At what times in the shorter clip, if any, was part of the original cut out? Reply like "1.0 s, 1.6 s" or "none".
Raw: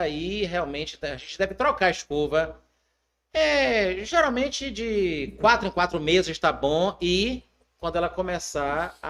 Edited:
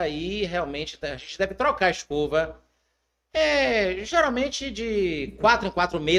none